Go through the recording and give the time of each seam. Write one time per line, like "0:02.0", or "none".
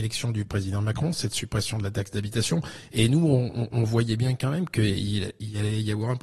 none